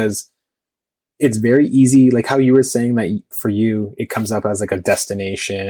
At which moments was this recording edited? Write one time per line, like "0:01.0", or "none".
0:03.3